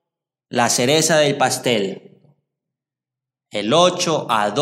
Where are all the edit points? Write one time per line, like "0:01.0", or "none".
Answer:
none